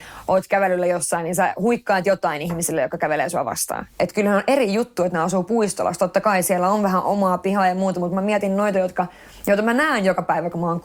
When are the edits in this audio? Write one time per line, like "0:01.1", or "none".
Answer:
0:03.9